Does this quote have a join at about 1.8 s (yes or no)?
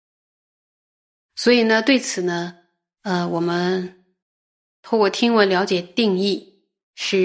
no